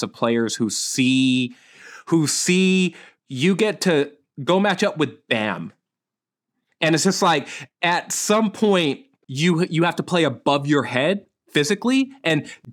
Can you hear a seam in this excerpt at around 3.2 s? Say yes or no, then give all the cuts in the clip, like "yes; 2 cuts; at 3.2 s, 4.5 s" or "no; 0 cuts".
yes; 1 cut; at 3.2 s